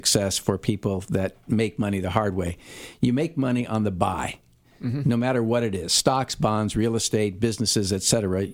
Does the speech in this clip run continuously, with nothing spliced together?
yes; 0 cuts

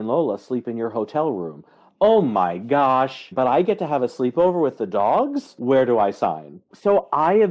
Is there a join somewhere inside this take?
yes; 1 cut; at 3.3 s

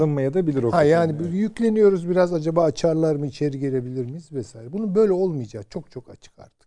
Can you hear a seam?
no; 0 cuts

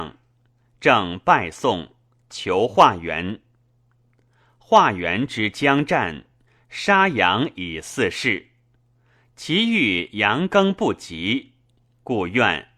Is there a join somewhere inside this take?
no; 0 cuts

